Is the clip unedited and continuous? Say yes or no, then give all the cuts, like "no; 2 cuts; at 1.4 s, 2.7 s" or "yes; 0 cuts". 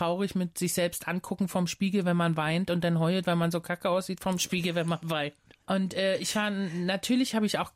yes; 0 cuts